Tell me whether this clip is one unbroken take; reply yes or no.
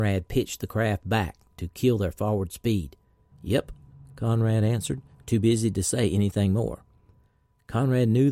no